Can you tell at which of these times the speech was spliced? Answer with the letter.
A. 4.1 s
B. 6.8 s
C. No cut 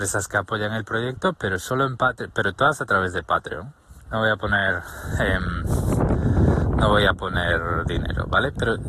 A